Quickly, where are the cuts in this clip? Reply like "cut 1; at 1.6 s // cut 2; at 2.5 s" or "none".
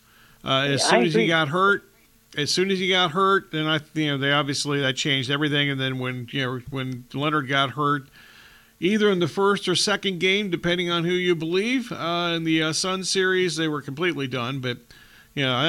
none